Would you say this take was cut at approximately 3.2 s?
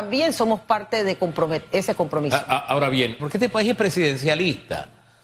yes; 1 cut; at 3.2 s

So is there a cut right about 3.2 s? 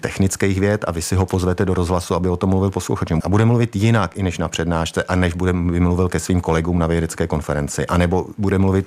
yes; 1 cut; at 3.2 s

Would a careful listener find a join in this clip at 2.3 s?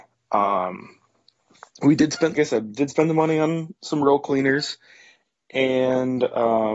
yes; 1 cut; at 2.3 s

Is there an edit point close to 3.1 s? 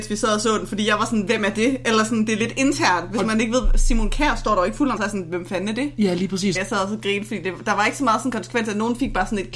no; 2 cuts; at 5.0 s, 6.5 s

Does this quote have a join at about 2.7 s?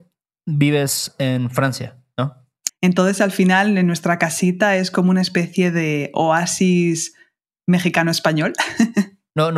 yes; 1 cut; at 2.7 s

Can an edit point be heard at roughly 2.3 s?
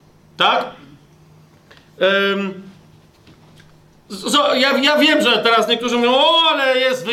no; 0 cuts

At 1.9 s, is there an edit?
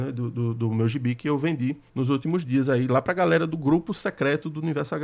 yes; 1 cut; at 1.9 s

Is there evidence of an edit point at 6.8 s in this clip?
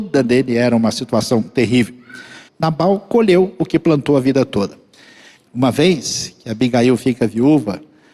no; 2 cuts; at 2.5 s, 5.3 s

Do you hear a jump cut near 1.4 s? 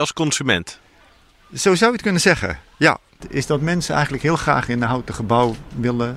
no; 1 cut; at 3.2 s

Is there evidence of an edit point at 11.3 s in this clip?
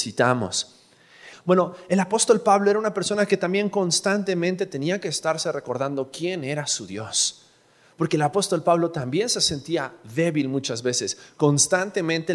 no; 1 cut; at 1.3 s

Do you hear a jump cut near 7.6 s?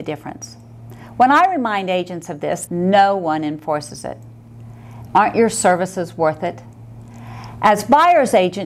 no; 2 cuts; at 2.7 s, 5.1 s

